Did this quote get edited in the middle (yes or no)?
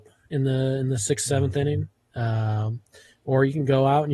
no